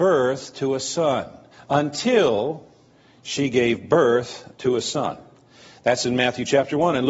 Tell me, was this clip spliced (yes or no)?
no